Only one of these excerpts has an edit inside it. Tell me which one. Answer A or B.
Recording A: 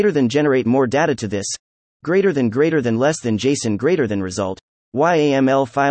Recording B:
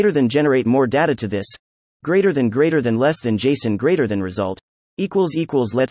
B